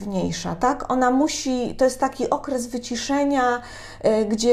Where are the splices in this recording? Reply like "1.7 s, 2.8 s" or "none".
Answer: none